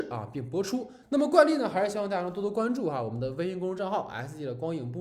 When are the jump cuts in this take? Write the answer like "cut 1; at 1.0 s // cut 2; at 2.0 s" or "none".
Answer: cut 1; at 1.0 s